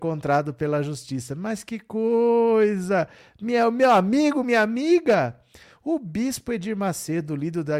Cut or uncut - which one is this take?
uncut